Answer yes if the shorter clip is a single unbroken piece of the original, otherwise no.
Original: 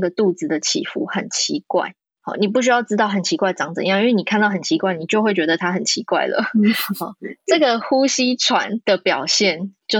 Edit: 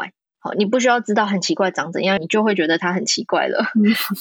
no